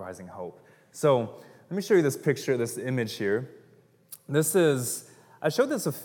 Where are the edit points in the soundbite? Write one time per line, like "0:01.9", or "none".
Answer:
none